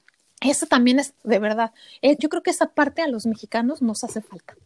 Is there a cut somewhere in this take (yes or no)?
yes